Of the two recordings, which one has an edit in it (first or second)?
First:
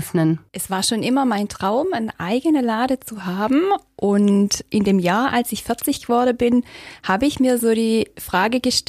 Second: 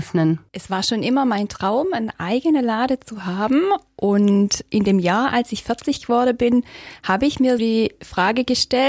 second